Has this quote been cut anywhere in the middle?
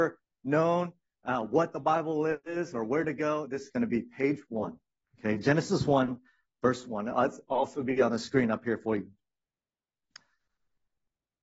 no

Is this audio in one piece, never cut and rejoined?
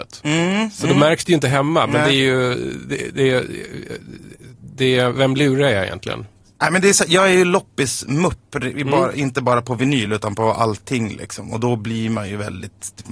yes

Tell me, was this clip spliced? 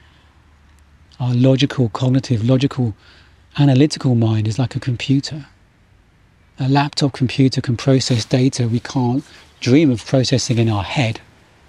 no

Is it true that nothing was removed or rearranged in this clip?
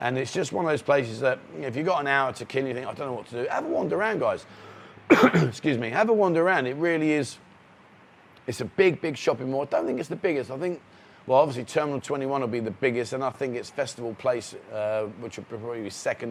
yes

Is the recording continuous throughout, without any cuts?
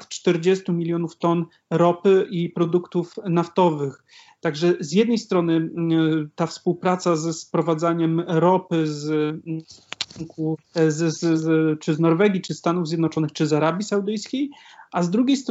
no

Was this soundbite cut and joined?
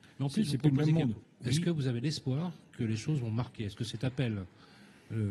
yes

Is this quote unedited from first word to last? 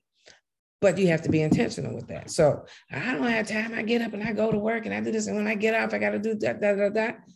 yes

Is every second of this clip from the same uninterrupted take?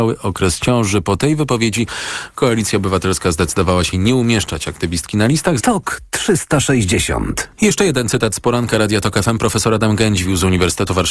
no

